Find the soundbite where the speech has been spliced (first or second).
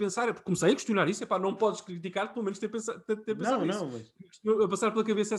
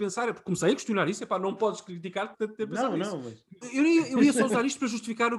second